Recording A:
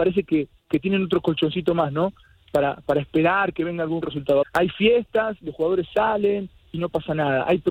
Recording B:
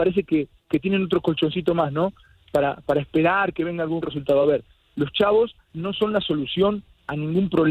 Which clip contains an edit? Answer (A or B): A